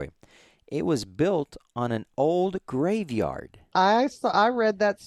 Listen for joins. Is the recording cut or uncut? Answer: cut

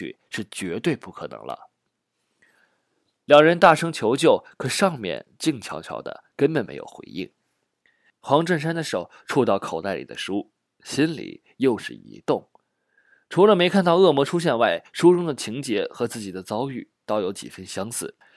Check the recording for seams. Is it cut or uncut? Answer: uncut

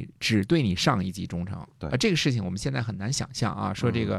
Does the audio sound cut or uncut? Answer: uncut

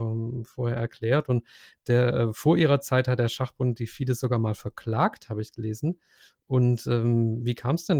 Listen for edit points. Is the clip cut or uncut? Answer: uncut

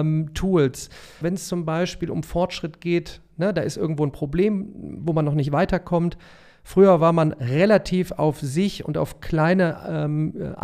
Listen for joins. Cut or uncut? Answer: cut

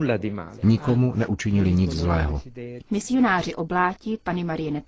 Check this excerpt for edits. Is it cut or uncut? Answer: cut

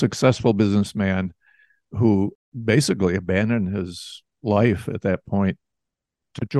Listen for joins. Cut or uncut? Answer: uncut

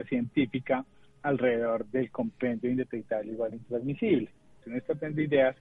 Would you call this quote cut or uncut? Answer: cut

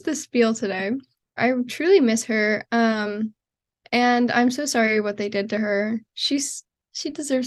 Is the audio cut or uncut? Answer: cut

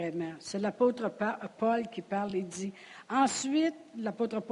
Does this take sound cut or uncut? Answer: uncut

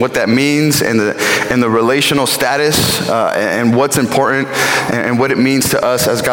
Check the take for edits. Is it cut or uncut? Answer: uncut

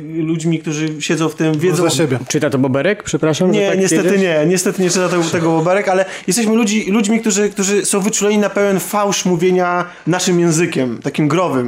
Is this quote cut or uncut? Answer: uncut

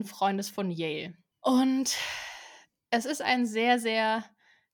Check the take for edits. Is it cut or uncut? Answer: cut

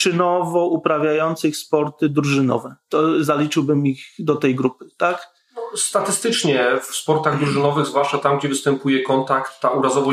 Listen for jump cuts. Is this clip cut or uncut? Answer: uncut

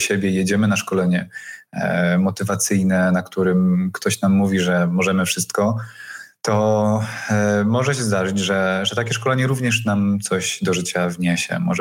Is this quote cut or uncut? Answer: uncut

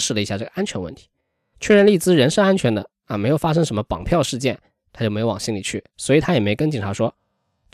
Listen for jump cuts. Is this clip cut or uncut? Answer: uncut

